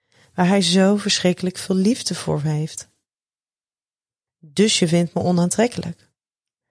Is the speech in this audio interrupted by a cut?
yes; 1 cut; at 4.3 s

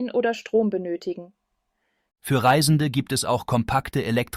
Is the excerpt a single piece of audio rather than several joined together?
no; 1 cut; at 2.0 s

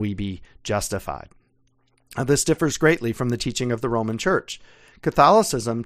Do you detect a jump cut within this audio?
no; 0 cuts

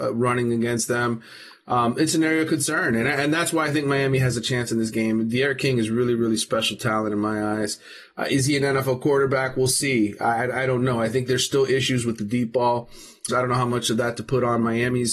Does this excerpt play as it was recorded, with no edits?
no; 1 cut; at 13.3 s

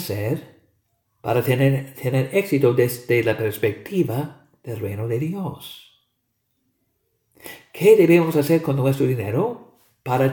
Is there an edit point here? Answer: no; 0 cuts

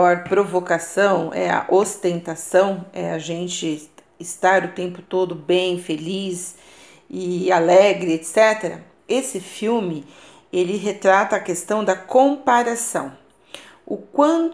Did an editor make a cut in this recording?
no; 0 cuts

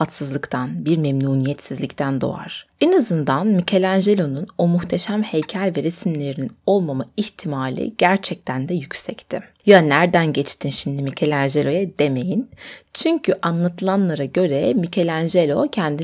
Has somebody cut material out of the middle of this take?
no; 0 cuts

